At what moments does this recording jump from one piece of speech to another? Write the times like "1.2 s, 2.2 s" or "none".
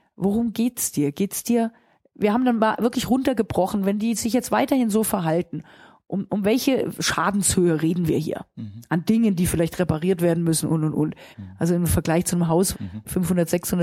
11.3 s, 12.7 s